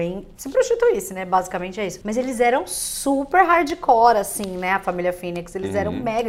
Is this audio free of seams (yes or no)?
yes